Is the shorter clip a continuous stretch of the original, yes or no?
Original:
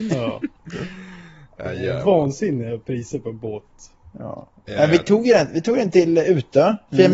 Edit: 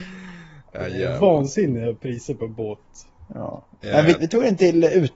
no